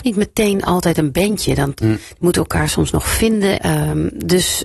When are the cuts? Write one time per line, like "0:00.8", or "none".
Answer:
0:03.6